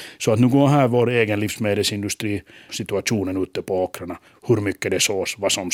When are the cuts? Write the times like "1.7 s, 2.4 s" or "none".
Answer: 2.7 s